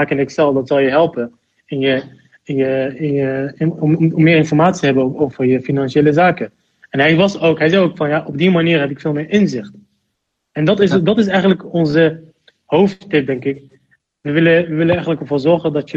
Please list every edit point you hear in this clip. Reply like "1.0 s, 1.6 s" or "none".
none